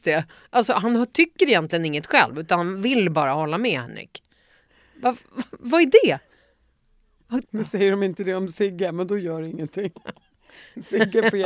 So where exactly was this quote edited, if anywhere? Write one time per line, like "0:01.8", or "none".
0:07.4
0:09.9